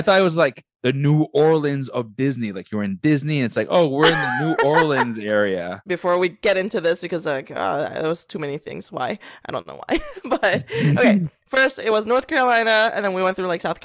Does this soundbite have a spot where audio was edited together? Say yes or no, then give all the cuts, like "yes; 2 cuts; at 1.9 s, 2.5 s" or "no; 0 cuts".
yes; 1 cut; at 5.9 s